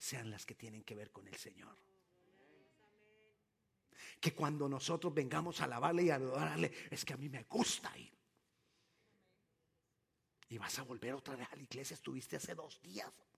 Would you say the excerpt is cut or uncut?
uncut